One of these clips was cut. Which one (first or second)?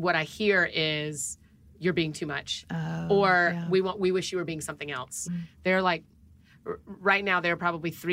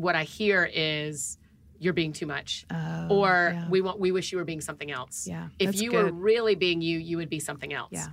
first